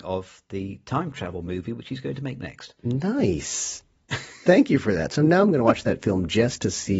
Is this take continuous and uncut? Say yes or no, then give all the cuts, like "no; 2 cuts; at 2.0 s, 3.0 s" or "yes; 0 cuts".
yes; 0 cuts